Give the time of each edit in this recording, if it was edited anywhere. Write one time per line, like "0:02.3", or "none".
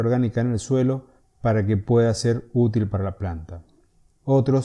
none

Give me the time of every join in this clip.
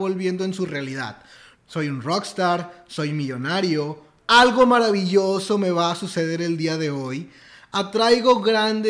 0:01.5

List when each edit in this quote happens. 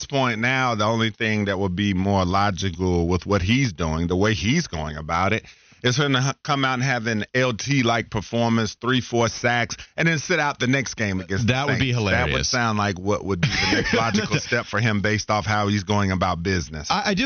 none

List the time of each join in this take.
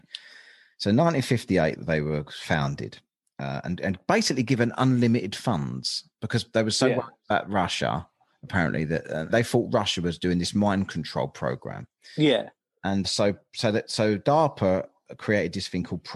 0:01.8
0:09.3
0:13.0

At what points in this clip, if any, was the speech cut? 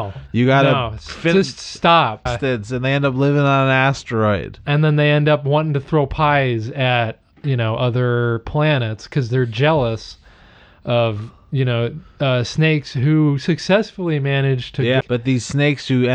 0:02.3
0:15.0

